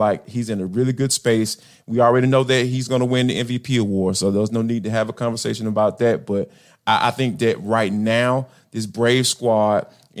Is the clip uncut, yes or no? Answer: yes